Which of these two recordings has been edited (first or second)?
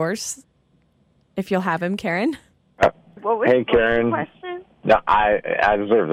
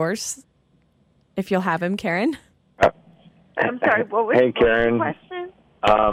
first